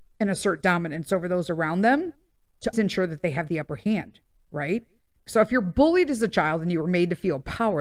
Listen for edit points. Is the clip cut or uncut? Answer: cut